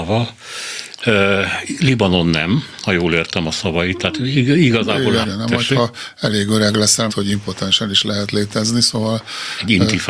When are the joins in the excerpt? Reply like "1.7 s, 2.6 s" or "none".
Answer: 5.2 s, 7.1 s